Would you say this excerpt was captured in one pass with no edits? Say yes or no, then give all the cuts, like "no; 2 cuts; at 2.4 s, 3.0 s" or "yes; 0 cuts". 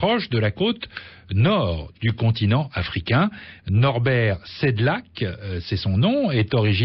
no; 1 cut; at 3.6 s